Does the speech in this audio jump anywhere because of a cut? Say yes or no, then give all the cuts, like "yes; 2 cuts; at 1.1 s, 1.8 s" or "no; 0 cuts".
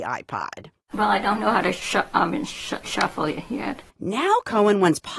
yes; 1 cut; at 3.9 s